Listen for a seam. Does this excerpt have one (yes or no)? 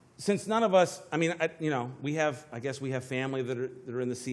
no